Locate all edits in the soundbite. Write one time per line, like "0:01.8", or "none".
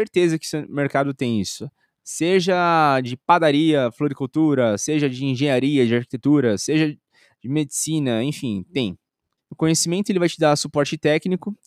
0:09.4